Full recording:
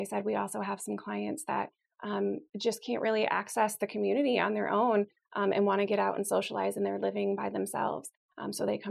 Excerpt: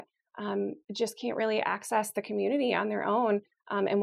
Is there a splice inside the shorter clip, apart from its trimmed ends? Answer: no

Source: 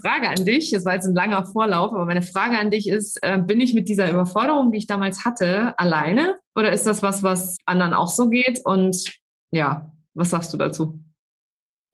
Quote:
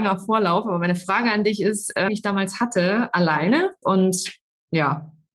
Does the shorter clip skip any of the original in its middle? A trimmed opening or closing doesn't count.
yes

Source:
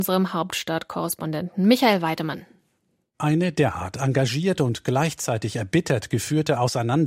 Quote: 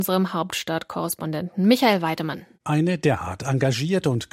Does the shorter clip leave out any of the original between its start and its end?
yes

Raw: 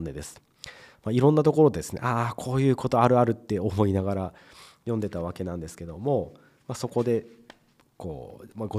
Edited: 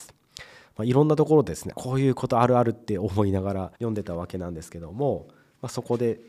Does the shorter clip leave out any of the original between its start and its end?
yes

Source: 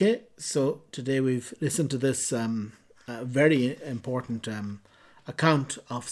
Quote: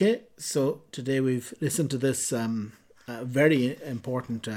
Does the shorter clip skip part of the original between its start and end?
no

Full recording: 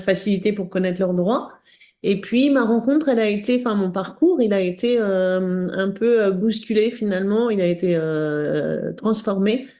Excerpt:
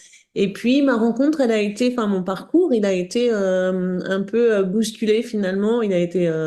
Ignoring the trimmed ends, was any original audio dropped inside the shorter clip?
no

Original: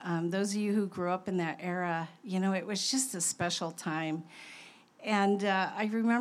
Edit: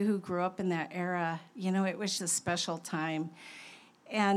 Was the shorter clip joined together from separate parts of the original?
yes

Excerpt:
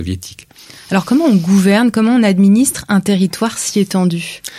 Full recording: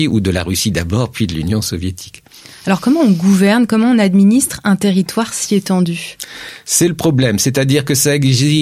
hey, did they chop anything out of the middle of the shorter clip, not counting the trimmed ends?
no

